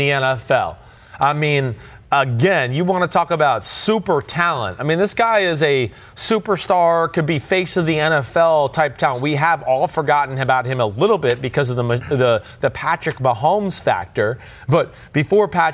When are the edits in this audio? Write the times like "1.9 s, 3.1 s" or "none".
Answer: none